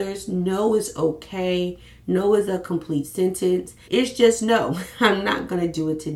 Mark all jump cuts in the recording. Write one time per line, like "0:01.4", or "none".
0:03.8